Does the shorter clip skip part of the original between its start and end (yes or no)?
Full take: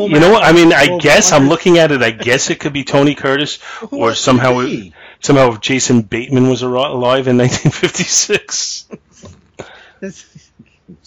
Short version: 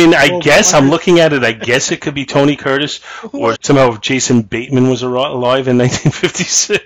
yes